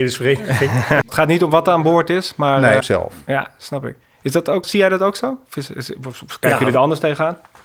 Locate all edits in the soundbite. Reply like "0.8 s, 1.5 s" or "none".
1.0 s, 2.8 s, 4.6 s